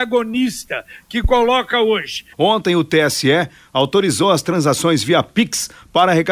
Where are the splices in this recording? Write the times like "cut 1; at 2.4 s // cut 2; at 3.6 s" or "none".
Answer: cut 1; at 2.3 s